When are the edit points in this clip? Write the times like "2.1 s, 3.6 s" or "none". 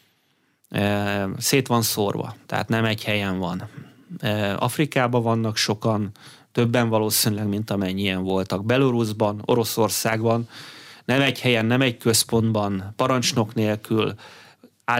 none